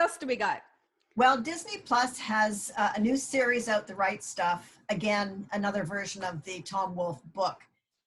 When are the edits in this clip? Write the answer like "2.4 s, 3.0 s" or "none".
none